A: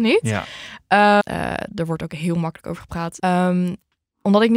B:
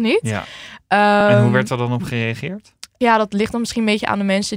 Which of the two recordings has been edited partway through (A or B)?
A